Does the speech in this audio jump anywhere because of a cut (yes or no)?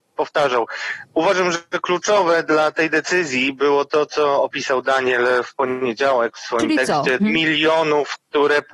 yes